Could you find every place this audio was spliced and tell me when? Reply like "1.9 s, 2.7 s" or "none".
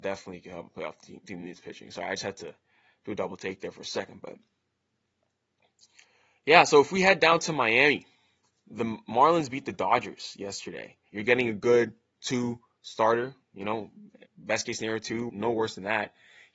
11.1 s, 14.3 s, 15.3 s

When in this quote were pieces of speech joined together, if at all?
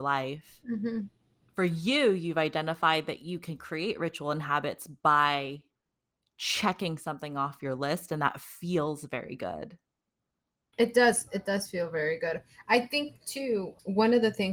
none

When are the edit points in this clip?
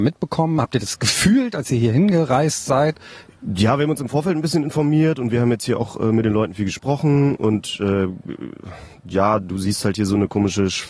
3.3 s

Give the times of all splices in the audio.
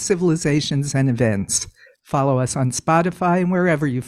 1.9 s

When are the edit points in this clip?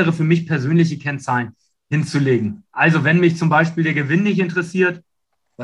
none

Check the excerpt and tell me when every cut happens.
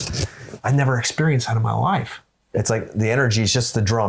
2.5 s

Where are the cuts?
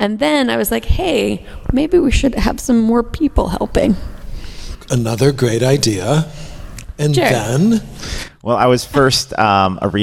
none

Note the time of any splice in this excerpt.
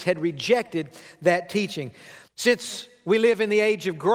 2.3 s

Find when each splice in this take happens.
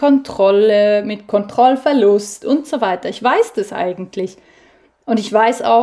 none

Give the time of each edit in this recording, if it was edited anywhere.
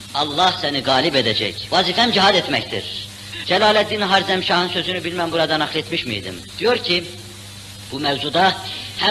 1.7 s, 3.4 s

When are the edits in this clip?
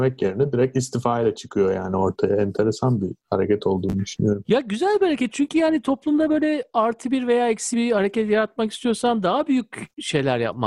7.7 s

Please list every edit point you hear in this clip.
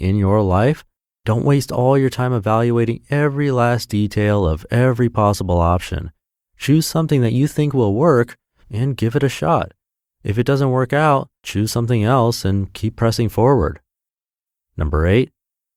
11.4 s

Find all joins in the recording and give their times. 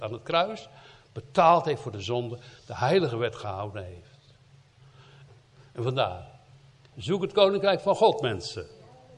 5.3 s, 6.9 s

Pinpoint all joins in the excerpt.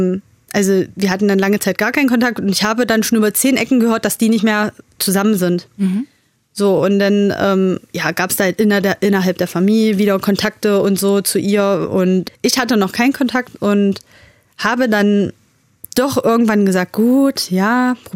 none

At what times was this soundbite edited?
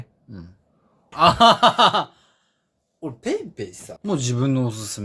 1.1 s, 4.0 s

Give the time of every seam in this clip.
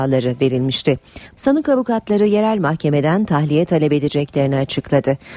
1.4 s

